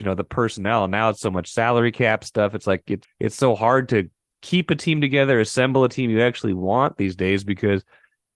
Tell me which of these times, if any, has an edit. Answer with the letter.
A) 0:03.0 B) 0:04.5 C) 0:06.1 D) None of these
A